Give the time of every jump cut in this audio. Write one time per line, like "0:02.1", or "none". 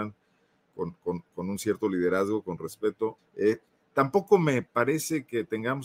0:03.2